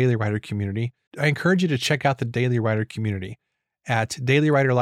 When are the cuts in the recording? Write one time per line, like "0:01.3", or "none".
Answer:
0:01.1